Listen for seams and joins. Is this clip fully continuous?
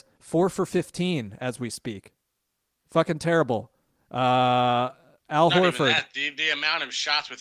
yes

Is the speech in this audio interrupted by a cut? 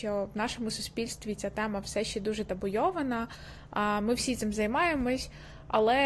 no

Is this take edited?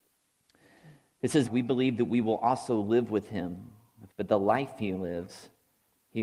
yes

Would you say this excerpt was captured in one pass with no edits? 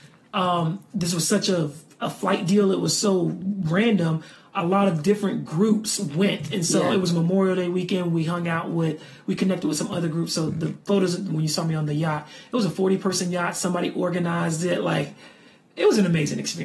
yes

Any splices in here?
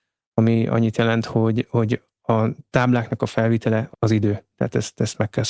yes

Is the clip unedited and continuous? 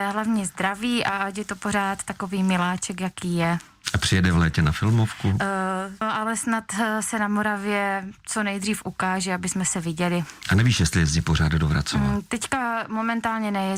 no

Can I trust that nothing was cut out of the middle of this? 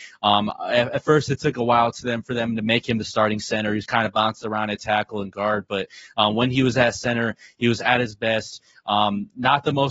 yes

